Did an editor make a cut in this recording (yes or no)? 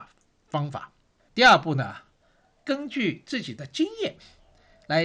yes